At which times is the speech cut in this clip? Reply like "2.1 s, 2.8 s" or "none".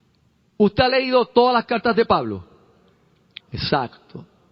3.4 s